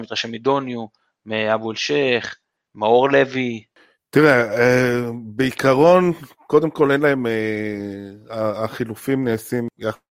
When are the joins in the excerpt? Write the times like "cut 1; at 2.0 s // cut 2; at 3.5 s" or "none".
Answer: none